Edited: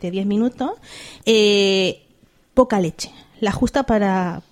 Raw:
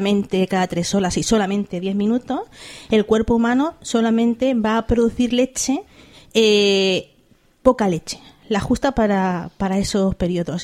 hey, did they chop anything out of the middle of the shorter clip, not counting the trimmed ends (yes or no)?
yes